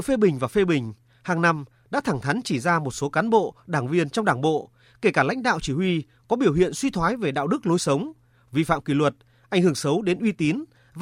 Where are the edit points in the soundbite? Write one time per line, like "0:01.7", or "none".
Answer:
none